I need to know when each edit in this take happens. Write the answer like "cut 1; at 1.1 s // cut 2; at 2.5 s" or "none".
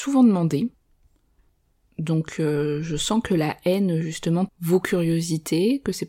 cut 1; at 4.5 s